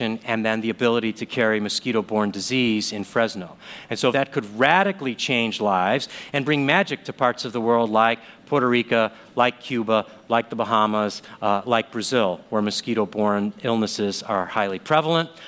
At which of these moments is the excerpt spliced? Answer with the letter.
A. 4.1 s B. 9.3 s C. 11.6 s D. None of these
A